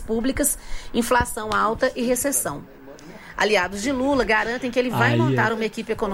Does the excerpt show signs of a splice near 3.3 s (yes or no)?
no